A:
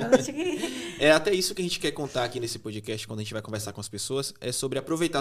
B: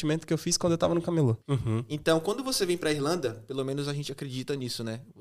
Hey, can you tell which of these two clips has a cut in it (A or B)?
B